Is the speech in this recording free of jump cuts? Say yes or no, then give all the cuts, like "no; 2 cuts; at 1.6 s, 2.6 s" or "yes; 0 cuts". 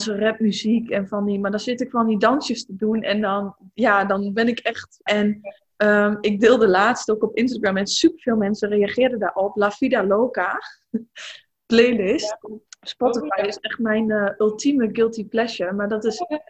no; 2 cuts; at 5.1 s, 12.7 s